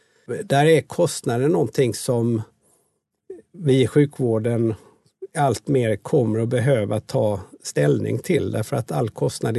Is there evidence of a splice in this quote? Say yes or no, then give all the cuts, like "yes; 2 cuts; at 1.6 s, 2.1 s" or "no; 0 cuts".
no; 0 cuts